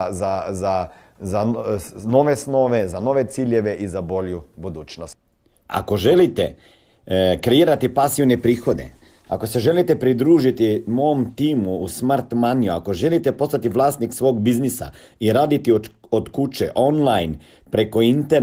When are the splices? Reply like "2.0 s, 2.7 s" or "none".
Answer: 5.7 s